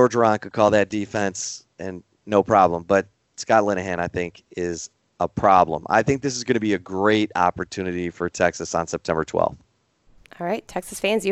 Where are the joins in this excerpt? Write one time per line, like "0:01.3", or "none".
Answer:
none